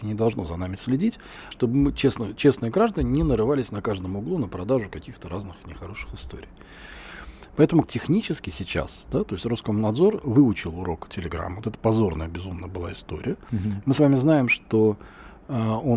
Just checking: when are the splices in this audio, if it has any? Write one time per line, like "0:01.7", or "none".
0:01.5
0:07.8